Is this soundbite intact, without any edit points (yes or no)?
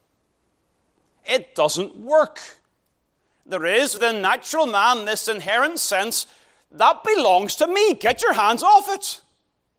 yes